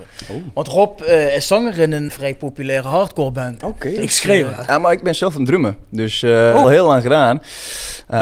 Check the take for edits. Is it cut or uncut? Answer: cut